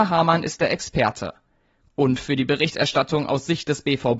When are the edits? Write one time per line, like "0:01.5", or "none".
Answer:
0:01.9

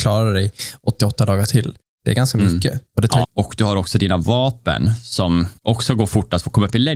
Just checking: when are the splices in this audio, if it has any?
0:03.2
0:05.6

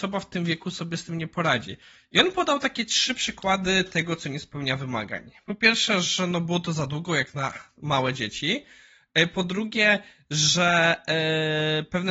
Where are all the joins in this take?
none

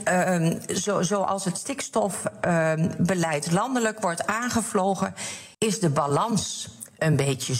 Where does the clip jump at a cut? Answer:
0:05.5

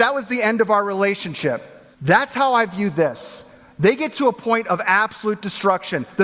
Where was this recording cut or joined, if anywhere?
0:01.9

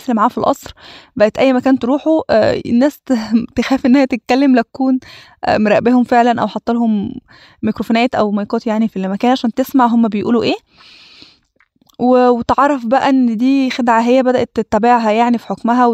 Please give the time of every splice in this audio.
0:08.9

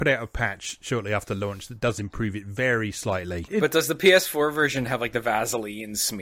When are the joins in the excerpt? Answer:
0:03.5

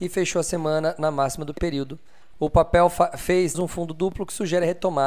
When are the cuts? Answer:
0:02.3
0:03.5

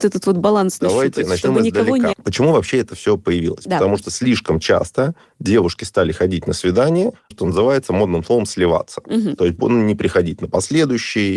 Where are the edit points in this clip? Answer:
0:02.1
0:07.3

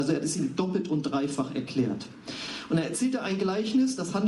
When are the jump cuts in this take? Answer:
none

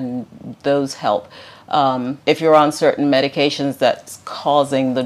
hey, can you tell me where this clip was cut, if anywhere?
0:02.2

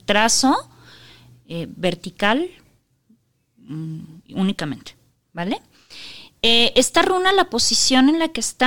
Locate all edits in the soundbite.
none

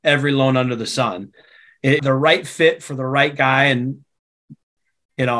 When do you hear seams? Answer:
0:02.0

